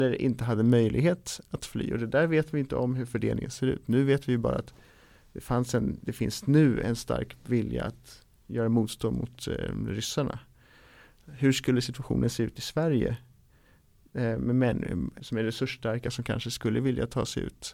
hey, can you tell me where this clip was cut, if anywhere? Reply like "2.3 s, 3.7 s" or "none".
15.2 s